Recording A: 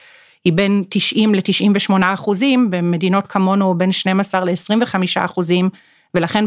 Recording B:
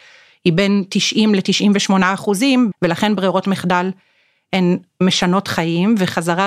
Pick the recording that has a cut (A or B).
B